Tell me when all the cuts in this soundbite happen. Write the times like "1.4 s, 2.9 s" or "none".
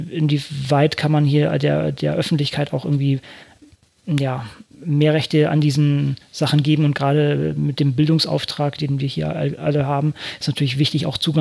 8.8 s

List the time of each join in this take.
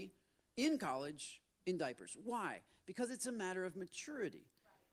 none

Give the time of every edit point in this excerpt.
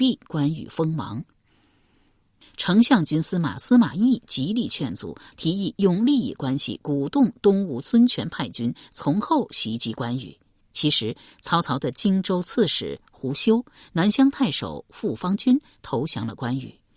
5.3 s, 10.6 s

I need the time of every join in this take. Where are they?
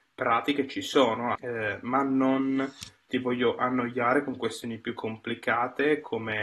1.4 s

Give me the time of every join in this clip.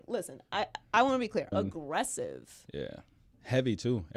1.5 s

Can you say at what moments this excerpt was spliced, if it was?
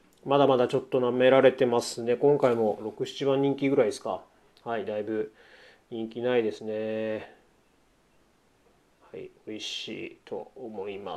none

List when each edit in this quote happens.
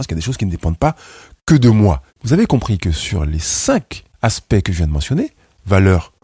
2.1 s, 4.1 s

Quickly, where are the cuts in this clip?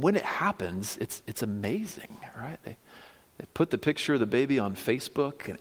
none

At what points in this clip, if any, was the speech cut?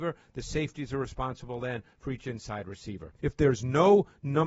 3.2 s

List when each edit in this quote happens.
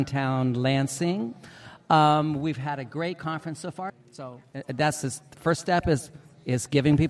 3.9 s

